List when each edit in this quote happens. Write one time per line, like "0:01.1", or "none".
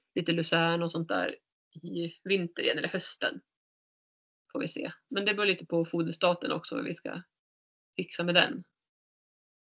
none